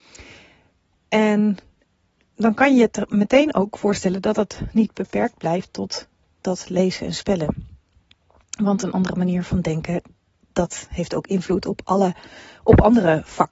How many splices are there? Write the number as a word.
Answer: zero